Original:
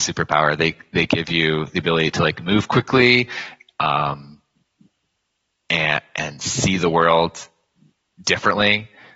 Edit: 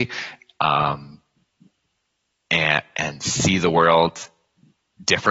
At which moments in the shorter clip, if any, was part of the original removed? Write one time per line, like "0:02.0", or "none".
none